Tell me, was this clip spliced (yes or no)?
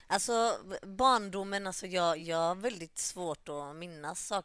no